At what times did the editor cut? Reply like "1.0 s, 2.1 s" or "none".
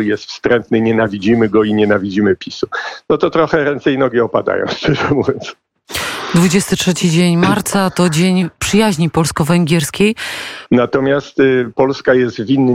10.7 s